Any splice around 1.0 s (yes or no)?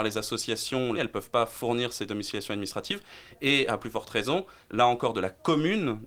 yes